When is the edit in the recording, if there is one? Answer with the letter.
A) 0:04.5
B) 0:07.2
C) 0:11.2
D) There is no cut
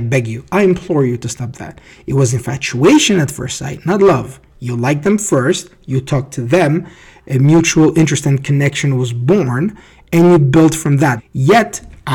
C